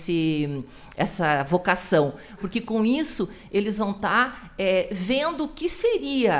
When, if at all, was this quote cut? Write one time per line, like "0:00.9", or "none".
0:02.4